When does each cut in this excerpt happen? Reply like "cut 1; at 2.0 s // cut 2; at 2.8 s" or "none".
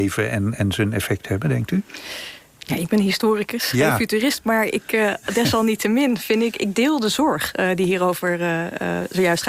none

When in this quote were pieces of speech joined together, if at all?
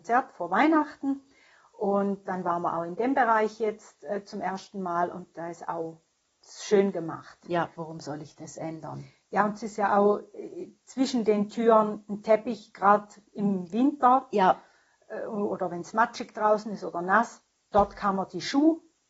cut 1; at 7.7 s

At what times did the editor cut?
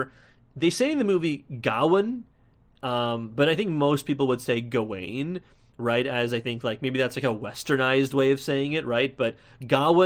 none

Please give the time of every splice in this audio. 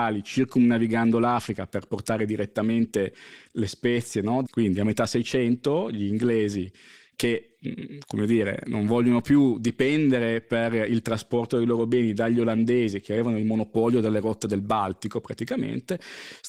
cut 1; at 4.4 s

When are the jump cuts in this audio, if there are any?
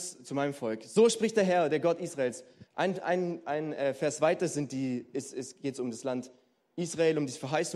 cut 1; at 2.7 s

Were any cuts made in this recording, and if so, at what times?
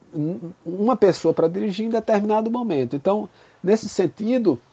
none

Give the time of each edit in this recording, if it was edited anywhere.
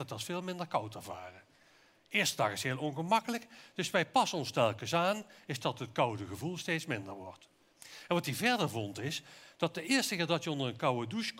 cut 1; at 7.7 s

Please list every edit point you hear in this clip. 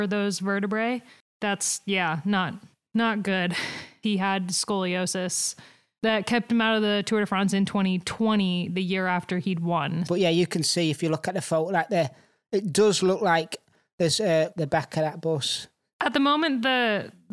cut 1; at 4.0 s // cut 2; at 10.1 s // cut 3; at 14.5 s

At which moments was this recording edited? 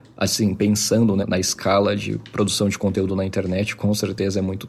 cut 1; at 1.2 s

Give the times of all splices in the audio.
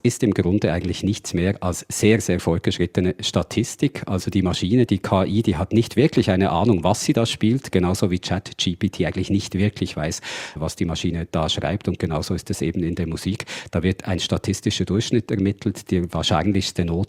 none

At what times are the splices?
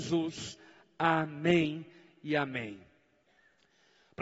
none

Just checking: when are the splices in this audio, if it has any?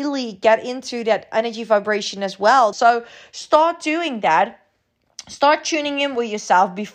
cut 1; at 2.7 s

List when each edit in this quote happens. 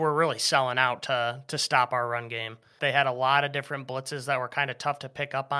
cut 1; at 2.8 s

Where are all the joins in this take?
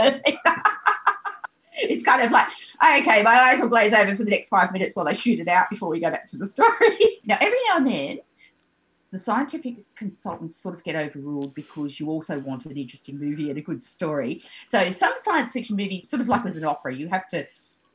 cut 1; at 7.2 s // cut 2; at 16.0 s

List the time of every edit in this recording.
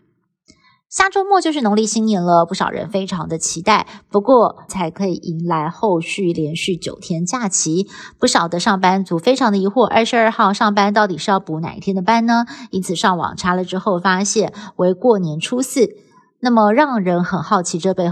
cut 1; at 4.7 s

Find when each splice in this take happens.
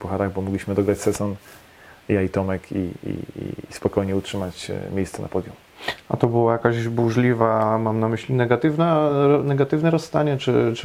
none

